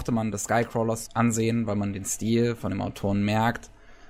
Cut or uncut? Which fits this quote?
cut